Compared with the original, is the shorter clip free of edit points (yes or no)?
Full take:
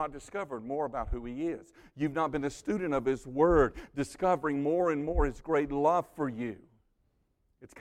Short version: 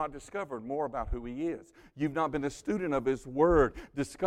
yes